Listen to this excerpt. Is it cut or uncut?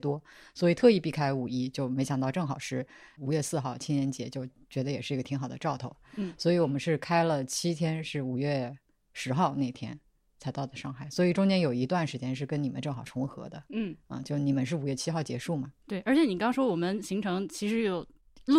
uncut